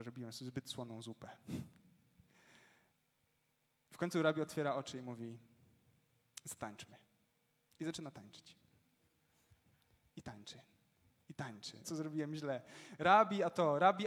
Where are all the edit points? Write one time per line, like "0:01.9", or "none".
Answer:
0:11.8

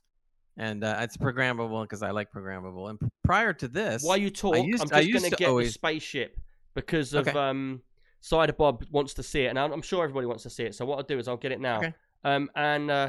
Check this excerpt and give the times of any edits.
none

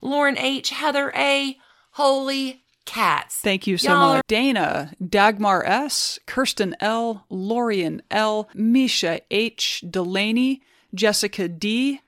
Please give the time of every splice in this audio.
0:04.2
0:08.5

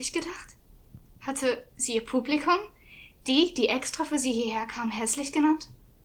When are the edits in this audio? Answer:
none

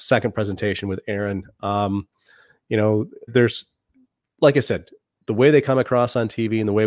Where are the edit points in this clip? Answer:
0:03.3

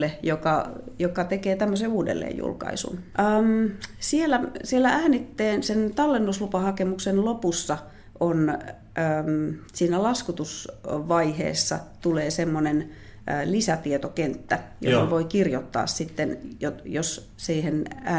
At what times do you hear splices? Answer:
0:03.1

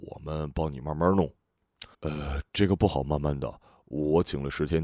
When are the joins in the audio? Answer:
0:01.9

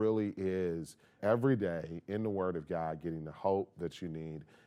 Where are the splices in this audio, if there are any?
0:01.2

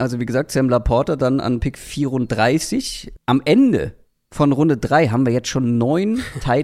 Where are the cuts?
0:03.2

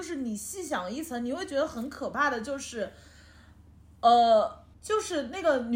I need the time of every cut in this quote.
0:04.7

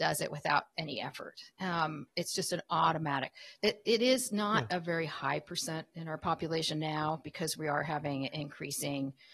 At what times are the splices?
0:03.6

